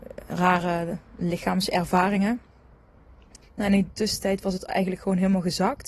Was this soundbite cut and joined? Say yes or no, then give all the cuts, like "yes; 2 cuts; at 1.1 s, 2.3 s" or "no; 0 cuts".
yes; 1 cut; at 3.4 s